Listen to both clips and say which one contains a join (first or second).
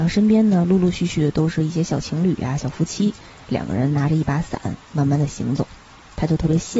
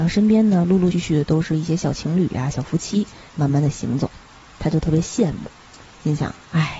second